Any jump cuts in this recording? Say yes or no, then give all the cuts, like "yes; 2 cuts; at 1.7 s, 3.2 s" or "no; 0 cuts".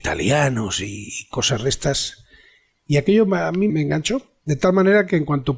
yes; 1 cut; at 3.7 s